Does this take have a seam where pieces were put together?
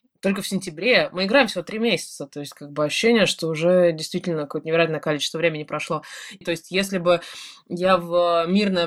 yes; 1 cut; at 6.4 s

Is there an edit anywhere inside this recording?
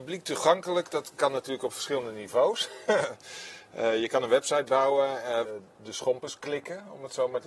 yes; 1 cut; at 5.4 s

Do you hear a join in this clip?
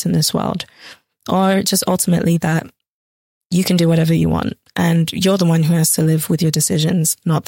no; 0 cuts

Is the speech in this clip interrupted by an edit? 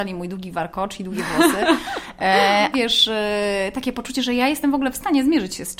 yes; 1 cut; at 2.7 s

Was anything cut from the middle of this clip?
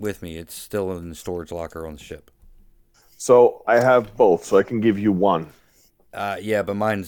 yes; 1 cut; at 3.6 s

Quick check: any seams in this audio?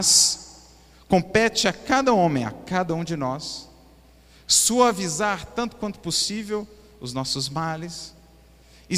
no; 0 cuts

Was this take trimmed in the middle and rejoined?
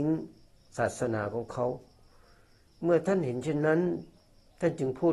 no; 0 cuts

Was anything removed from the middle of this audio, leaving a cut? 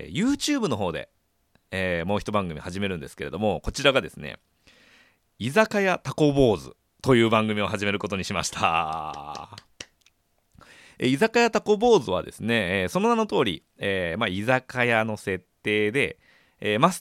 no; 0 cuts

